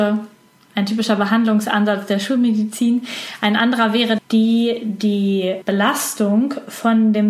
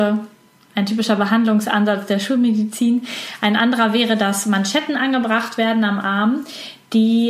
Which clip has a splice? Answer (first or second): first